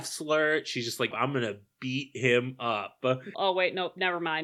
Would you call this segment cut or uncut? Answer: cut